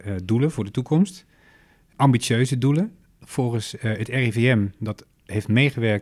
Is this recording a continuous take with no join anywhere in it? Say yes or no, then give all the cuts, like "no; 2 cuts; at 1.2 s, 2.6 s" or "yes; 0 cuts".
yes; 0 cuts